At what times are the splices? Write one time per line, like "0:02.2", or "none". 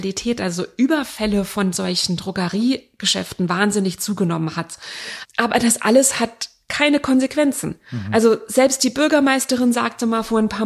none